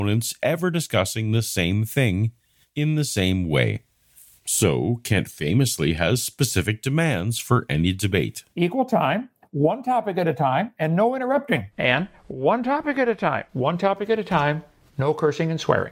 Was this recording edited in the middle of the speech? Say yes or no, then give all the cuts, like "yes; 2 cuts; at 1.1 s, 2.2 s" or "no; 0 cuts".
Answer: yes; 1 cut; at 11.7 s